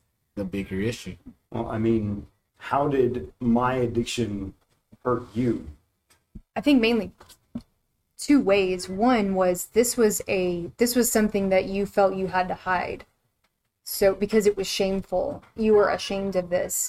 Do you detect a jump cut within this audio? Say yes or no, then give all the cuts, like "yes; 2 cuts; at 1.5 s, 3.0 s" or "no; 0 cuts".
yes; 1 cut; at 2.5 s